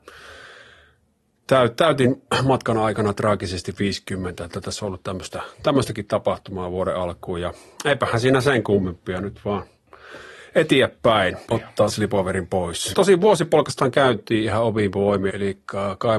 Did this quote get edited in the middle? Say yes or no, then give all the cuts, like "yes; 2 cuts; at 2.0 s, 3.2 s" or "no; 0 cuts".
yes; 3 cuts; at 11.5 s, 12.9 s, 15.3 s